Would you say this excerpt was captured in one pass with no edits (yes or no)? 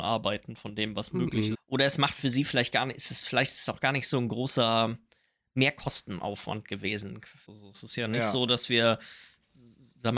no